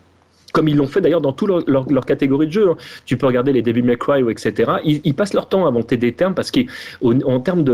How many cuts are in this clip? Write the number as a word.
zero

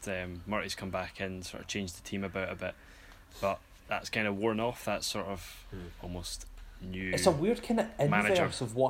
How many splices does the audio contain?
zero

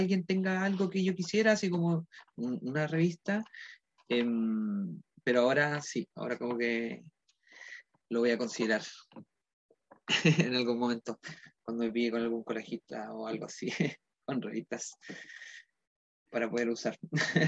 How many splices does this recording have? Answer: one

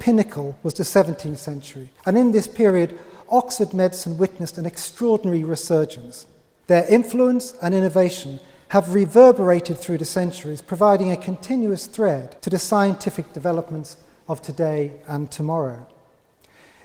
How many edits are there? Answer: three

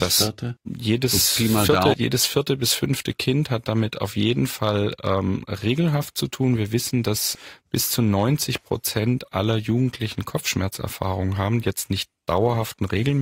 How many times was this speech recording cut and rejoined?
one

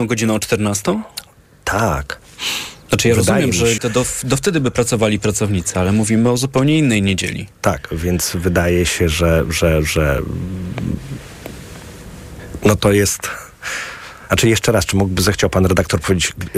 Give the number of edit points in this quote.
one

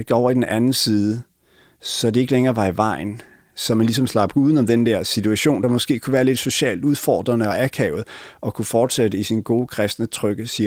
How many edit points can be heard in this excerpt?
zero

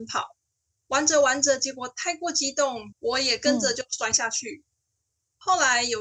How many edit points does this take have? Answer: one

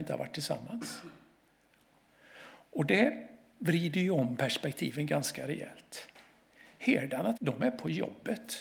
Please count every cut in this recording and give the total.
one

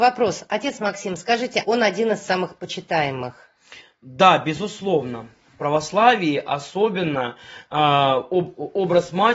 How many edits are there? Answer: one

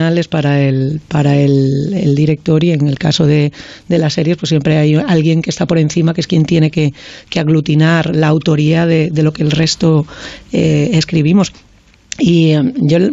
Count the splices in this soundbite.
zero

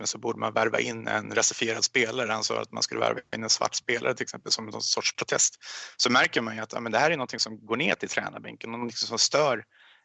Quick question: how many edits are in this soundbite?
zero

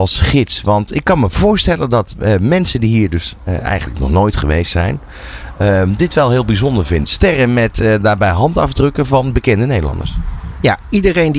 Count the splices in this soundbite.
one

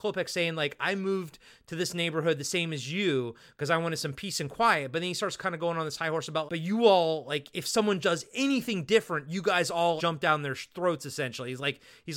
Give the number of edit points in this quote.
three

